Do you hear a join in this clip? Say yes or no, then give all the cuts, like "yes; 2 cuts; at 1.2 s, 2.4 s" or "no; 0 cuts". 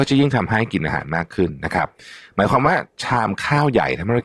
no; 0 cuts